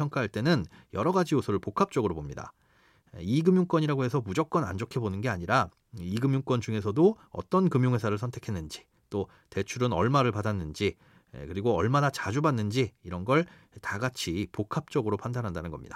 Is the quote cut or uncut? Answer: uncut